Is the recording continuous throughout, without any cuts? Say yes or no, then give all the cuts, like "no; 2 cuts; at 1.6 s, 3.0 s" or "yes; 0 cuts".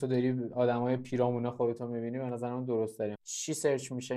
no; 1 cut; at 3.1 s